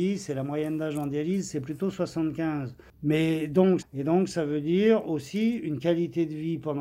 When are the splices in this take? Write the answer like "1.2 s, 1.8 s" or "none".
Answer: 3.8 s